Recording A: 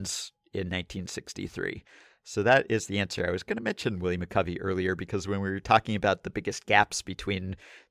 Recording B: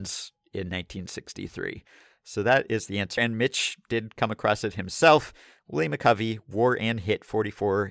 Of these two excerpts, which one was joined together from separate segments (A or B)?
B